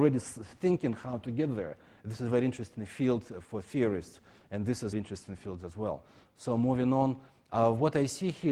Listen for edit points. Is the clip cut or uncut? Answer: cut